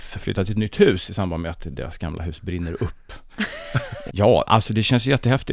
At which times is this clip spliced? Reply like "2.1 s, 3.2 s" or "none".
4.1 s